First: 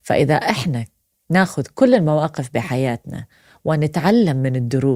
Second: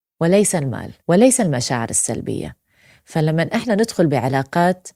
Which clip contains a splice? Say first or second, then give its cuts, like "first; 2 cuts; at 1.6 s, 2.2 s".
second; 1 cut; at 1.0 s